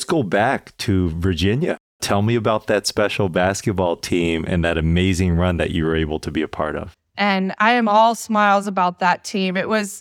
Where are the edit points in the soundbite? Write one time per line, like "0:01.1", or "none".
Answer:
0:07.1